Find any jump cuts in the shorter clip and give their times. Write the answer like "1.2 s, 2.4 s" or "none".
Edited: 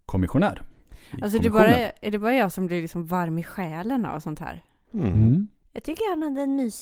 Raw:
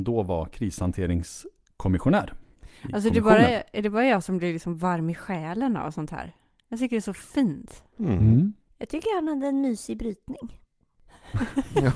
4.8 s